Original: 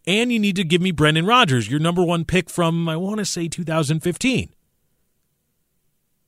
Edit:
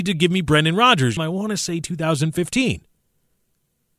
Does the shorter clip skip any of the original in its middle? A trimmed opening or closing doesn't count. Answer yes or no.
yes